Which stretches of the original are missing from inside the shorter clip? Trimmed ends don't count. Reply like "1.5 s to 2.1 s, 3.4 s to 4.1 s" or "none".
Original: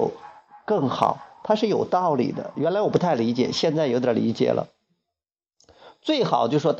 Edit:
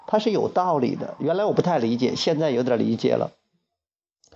none